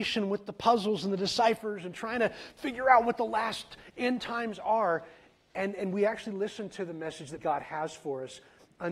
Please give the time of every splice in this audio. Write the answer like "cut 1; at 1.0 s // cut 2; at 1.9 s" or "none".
cut 1; at 7.4 s